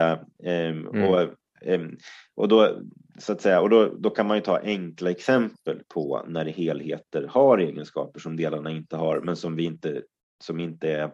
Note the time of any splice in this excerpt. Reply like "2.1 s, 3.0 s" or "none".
none